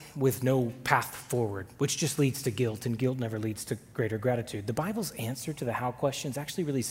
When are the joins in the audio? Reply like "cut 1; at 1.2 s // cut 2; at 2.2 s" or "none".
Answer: none